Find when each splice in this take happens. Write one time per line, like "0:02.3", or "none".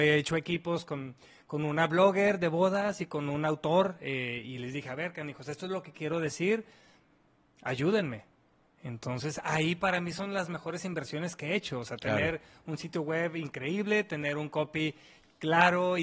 none